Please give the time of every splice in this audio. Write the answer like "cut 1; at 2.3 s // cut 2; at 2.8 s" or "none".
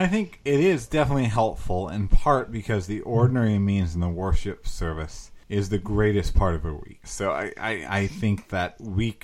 cut 1; at 5.4 s // cut 2; at 7.0 s

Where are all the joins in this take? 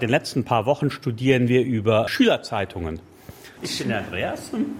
cut 1; at 2.1 s // cut 2; at 3.6 s

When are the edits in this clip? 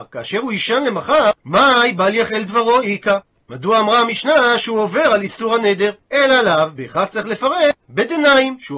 cut 1; at 6.0 s

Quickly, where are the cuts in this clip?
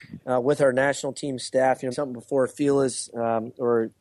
cut 1; at 1.9 s

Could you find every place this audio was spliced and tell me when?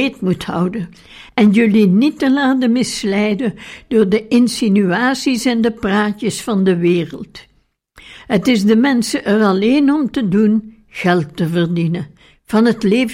cut 1; at 1.3 s

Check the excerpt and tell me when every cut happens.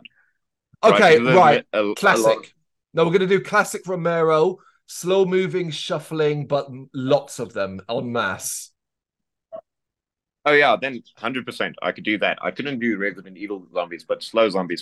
none

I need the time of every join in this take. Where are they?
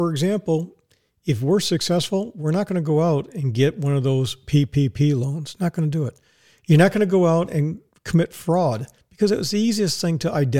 none

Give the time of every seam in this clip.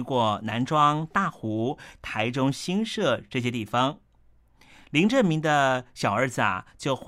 none

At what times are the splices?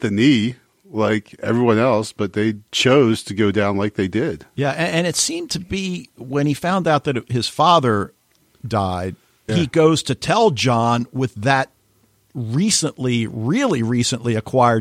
cut 1; at 2.7 s // cut 2; at 9.5 s

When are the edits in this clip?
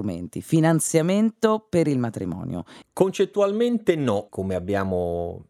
cut 1; at 2.8 s // cut 2; at 4.3 s

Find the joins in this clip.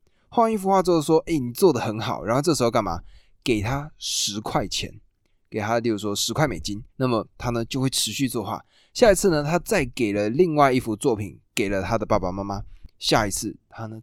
cut 1; at 6.9 s // cut 2; at 12.9 s

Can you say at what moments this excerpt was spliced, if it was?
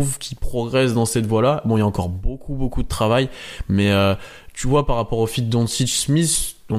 none

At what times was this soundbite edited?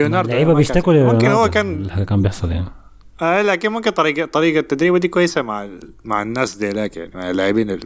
none

